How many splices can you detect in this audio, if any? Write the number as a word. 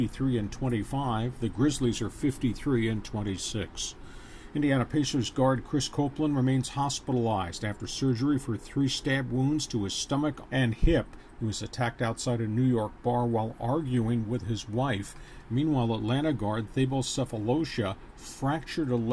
one